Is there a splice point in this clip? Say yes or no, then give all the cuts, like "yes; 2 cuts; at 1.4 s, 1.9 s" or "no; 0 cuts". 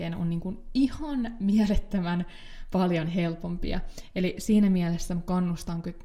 no; 0 cuts